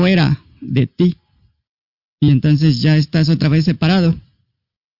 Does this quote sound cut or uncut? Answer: uncut